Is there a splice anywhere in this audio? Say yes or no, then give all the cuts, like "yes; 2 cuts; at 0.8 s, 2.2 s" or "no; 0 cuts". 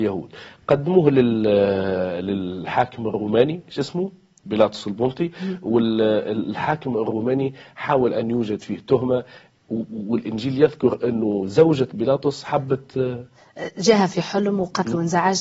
yes; 1 cut; at 4.4 s